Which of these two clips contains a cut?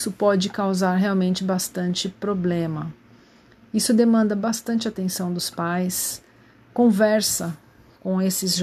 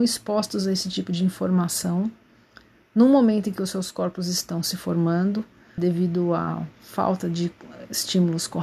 second; 1 cut; at 5.8 s

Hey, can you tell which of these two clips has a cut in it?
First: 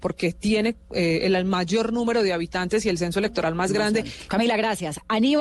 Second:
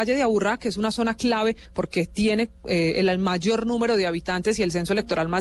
first; 1 cut; at 4.3 s

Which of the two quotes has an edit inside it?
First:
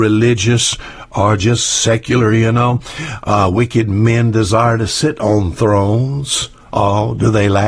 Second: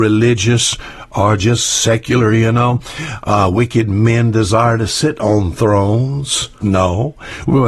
second; 1 cut; at 6.6 s

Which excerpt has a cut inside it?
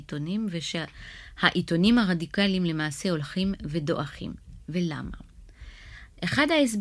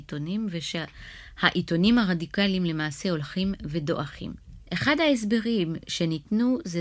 second; 1 cut; at 4.6 s

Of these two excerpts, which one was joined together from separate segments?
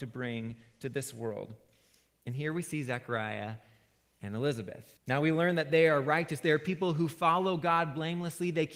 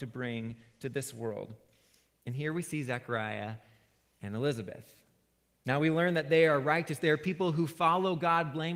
first; 1 cut; at 5.0 s

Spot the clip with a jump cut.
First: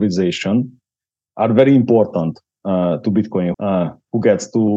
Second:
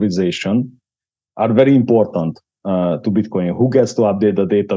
first; 1 cut; at 3.5 s

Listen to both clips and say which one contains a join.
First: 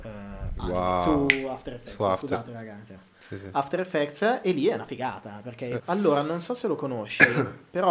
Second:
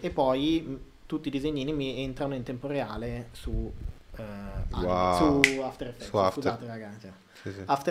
first; 1 cut; at 5.8 s

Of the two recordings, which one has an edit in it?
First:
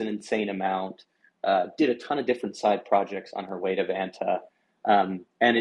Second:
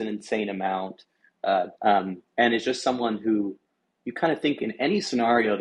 second; 1 cut; at 1.7 s

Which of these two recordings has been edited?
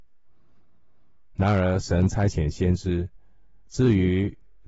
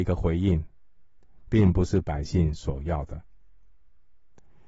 first; 1 cut; at 3.7 s

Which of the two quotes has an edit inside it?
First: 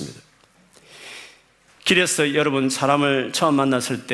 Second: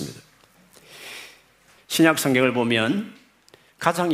second; 1 cut; at 1.8 s

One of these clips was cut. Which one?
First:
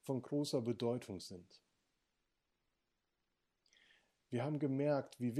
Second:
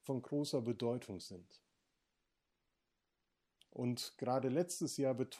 second; 1 cut; at 3.6 s

